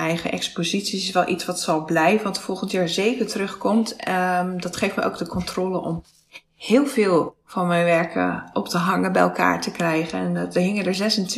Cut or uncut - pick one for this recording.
uncut